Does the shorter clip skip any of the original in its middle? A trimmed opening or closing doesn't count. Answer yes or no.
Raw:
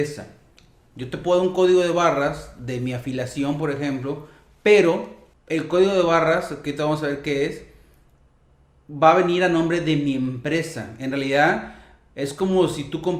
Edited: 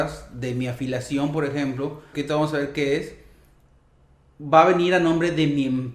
yes